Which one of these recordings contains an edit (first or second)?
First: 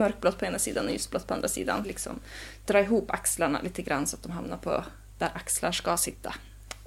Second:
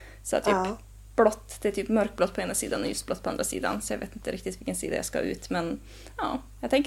first